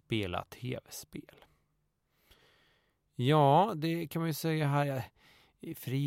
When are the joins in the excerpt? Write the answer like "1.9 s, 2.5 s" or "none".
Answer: none